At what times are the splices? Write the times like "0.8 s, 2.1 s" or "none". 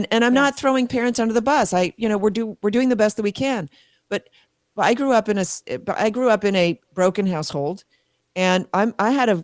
none